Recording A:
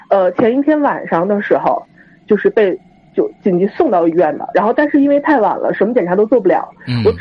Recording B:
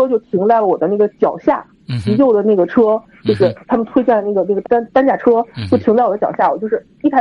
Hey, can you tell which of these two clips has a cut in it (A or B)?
B